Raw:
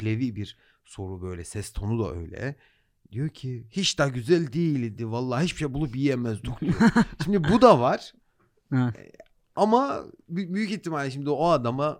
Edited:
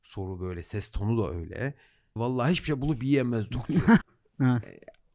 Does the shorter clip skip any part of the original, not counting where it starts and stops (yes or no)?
yes